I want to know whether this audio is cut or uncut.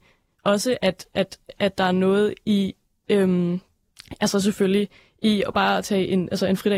uncut